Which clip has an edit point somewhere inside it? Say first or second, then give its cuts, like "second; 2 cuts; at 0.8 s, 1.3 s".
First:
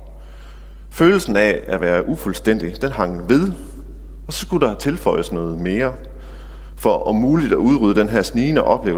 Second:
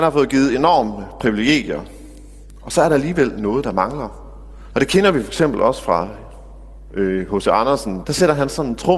second; 2 cuts; at 4.7 s, 8.0 s